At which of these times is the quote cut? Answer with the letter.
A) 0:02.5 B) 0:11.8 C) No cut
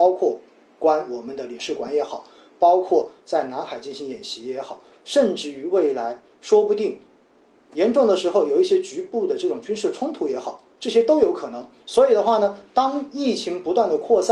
B